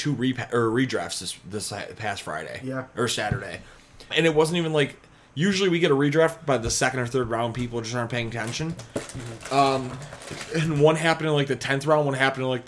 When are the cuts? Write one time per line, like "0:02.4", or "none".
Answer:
0:04.1